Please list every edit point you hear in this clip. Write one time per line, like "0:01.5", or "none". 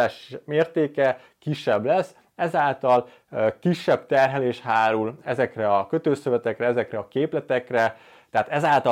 0:05.2